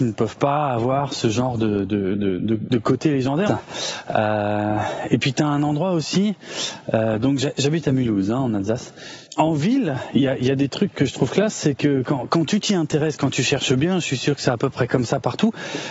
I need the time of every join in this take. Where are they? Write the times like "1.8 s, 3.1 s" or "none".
3.5 s, 9.3 s